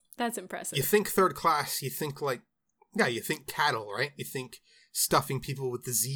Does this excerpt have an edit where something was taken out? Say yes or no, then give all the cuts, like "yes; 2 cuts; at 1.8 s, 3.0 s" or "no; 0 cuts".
no; 0 cuts